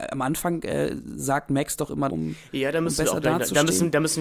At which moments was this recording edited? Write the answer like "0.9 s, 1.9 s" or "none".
2.1 s

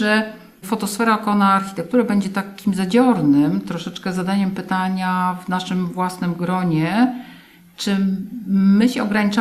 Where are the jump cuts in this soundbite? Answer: none

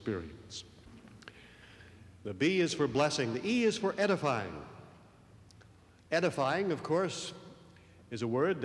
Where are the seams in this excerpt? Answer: none

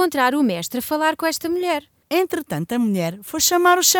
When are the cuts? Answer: 2.0 s

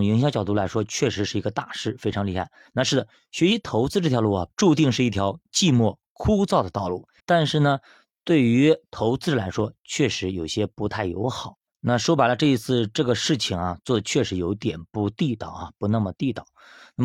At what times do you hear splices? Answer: 2.6 s, 4.5 s, 7.2 s

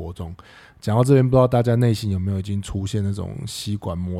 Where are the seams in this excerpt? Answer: none

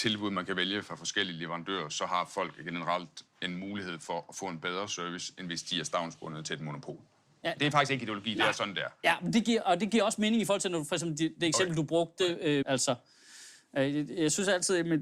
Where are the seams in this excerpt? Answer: 12.6 s

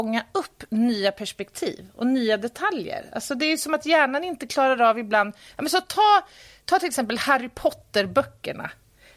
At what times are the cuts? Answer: none

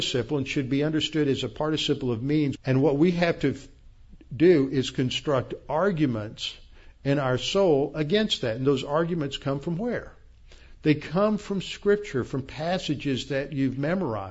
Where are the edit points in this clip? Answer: 2.5 s

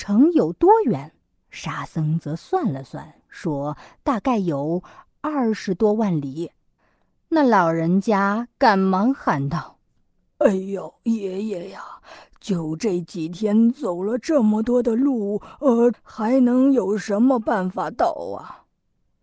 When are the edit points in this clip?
15.9 s

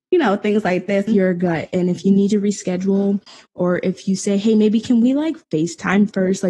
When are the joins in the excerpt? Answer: 1.1 s

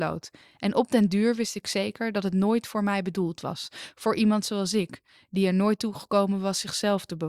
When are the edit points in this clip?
none

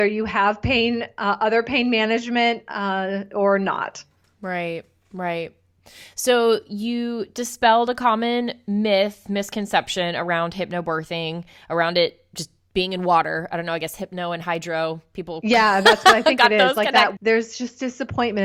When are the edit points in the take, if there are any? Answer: 17.2 s

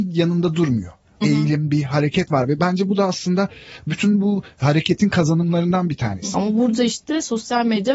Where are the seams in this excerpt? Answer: 1.2 s, 6.3 s

